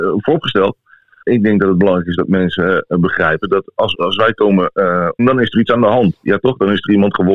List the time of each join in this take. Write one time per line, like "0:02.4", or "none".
0:01.2
0:03.9
0:05.2